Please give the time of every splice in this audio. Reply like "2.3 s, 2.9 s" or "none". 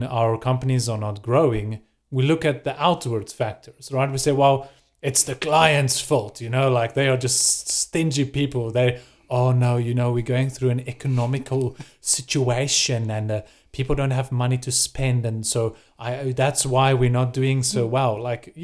none